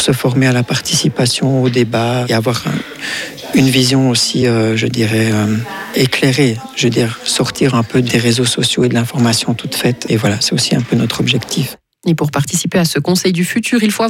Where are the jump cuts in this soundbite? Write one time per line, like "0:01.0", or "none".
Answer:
none